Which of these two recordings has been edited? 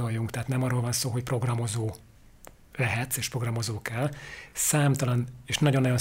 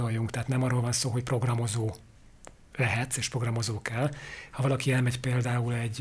second; 1 cut; at 4.5 s

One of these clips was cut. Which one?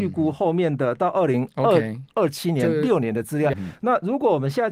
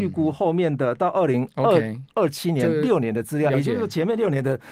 first; 1 cut; at 3.5 s

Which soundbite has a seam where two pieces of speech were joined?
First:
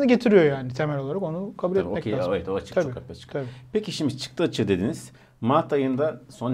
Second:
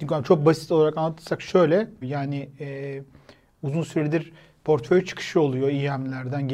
second; 1 cut; at 2.0 s

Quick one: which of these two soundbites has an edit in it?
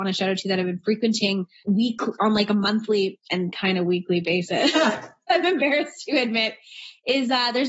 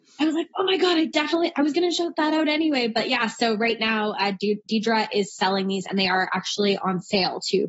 first; 1 cut; at 1.6 s

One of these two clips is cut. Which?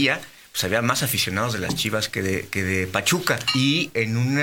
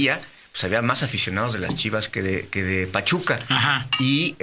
first; 1 cut; at 3.5 s

